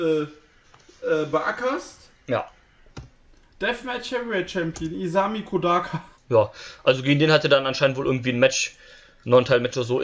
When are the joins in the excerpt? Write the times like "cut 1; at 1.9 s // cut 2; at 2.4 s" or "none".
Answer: cut 1; at 2.9 s // cut 2; at 6.1 s